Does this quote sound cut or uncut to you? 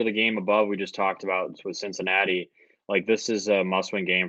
uncut